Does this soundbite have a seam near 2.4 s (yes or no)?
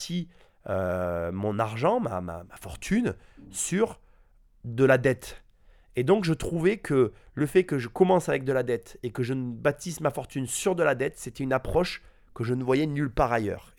yes